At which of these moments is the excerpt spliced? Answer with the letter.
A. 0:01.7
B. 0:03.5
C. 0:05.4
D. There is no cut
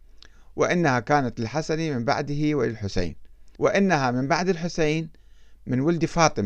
B